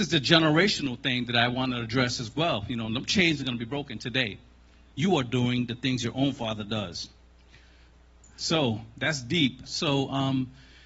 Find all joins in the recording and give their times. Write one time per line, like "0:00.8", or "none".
0:04.9
0:09.7